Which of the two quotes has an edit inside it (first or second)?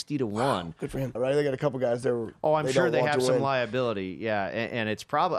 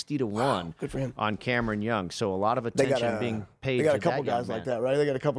first